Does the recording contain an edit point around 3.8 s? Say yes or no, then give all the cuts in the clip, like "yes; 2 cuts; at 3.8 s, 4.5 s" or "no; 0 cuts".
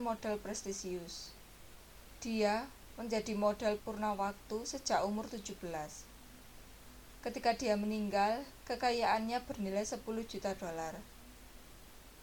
yes; 1 cut; at 3.8 s